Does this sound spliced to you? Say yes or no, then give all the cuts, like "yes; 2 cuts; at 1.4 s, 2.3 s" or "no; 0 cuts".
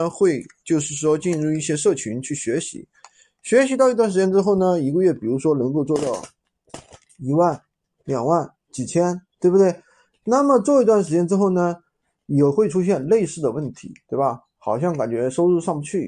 no; 0 cuts